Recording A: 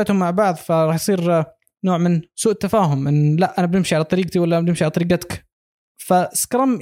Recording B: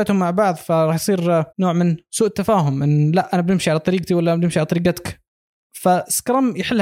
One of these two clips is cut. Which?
B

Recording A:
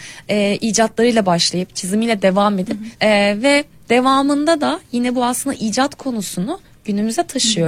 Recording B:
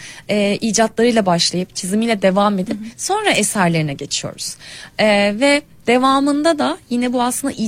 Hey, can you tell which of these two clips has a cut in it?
A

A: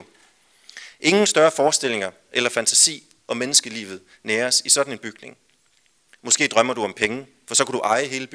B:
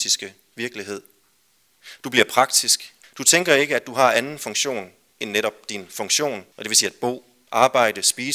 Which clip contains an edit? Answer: B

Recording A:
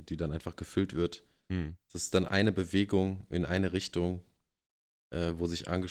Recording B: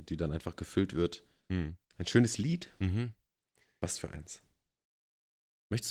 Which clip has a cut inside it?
B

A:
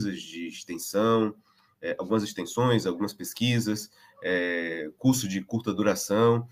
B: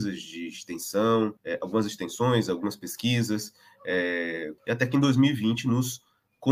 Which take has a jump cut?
B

